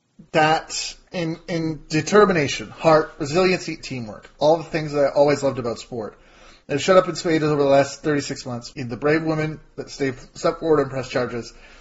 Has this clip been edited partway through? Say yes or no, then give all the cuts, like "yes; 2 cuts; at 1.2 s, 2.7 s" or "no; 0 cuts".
yes; 2 cuts; at 3.8 s, 8.7 s